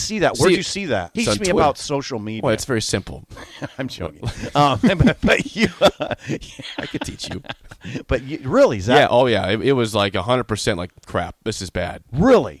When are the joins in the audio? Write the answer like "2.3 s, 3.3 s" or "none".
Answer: 1.2 s